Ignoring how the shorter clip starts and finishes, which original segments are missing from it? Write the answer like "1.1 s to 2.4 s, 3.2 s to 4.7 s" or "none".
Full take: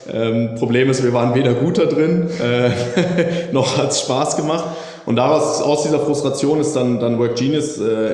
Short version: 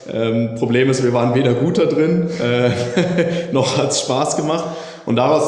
none